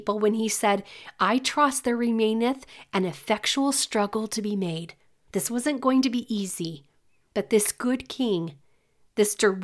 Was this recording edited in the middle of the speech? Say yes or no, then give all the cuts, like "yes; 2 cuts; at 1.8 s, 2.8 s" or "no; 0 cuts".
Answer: yes; 1 cut; at 5.3 s